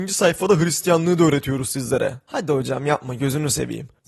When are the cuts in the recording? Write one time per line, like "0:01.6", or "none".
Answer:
none